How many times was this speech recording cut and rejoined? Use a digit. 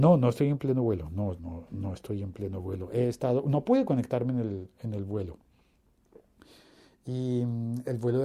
1